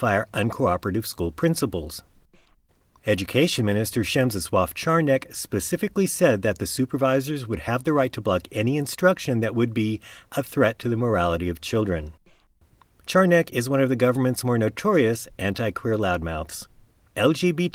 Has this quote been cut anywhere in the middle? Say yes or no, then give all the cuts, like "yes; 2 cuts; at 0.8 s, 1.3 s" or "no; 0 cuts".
no; 0 cuts